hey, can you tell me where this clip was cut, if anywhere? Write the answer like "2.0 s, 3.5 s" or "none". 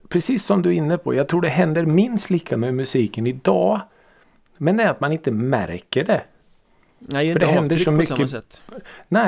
none

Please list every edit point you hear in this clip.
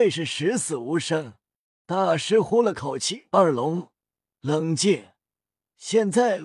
1.8 s

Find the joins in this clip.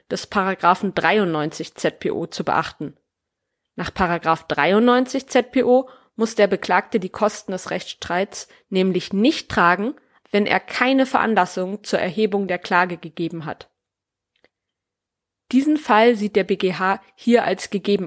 10.2 s

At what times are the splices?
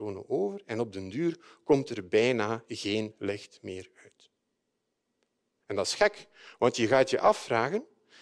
none

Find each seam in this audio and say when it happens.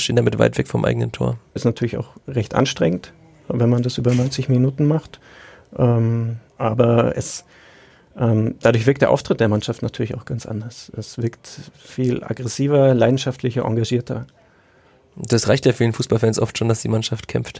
1.6 s, 6.5 s

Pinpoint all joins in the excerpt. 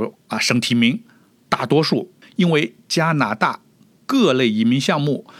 2.2 s

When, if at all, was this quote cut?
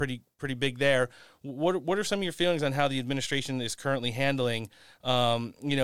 none

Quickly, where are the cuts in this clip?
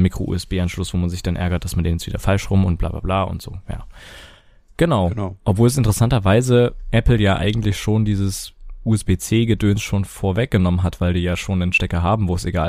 none

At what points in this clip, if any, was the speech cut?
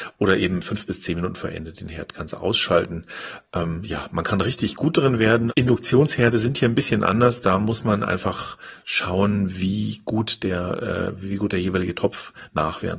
5.5 s

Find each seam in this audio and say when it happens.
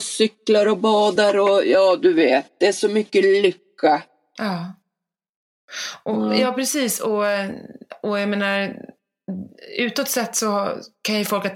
none

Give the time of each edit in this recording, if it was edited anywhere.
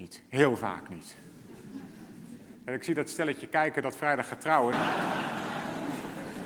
2.5 s, 4.7 s

